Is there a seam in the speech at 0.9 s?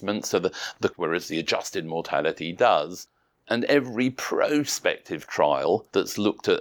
yes; 1 cut; at 0.9 s

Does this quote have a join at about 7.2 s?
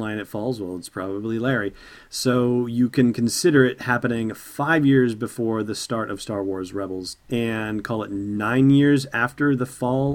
yes; 1 cut; at 7.2 s

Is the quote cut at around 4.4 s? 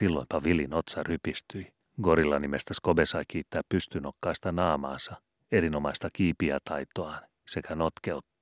no; 1 cut; at 1.8 s

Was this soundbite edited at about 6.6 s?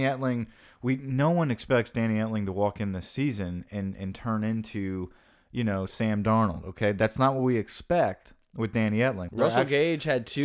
no; 1 cut; at 9.3 s

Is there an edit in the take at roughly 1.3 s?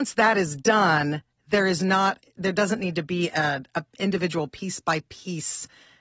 no; 0 cuts

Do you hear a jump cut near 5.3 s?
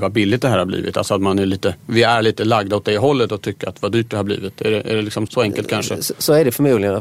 yes; 1 cut; at 5.3 s

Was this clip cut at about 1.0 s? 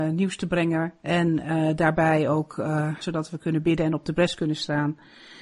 yes; 2 cuts; at 1.0 s, 3.0 s

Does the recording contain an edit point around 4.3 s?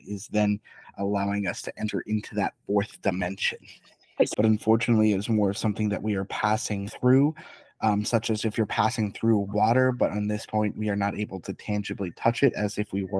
yes; 1 cut; at 4.3 s

